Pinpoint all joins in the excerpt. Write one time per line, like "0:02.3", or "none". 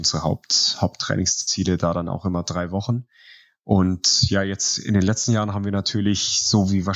none